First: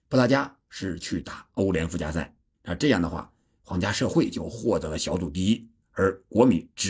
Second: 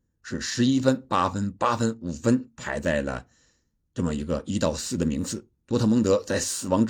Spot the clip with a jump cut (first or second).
first